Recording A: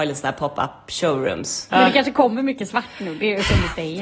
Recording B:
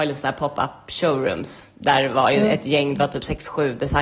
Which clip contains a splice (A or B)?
A